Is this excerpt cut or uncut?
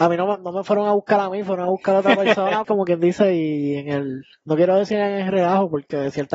cut